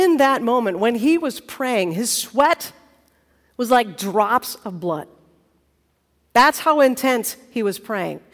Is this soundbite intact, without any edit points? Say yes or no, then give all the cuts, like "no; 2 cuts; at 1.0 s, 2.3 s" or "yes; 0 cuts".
yes; 0 cuts